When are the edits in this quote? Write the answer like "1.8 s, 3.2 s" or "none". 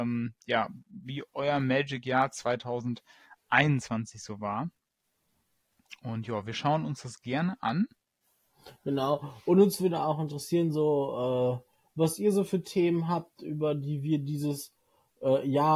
none